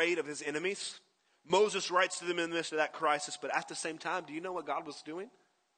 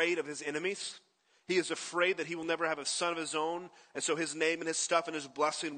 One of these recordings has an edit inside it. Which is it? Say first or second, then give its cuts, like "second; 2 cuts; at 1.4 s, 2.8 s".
first; 1 cut; at 1.3 s